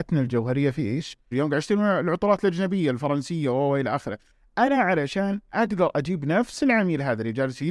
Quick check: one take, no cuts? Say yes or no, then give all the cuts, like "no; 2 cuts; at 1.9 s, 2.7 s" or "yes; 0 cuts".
no; 1 cut; at 1.3 s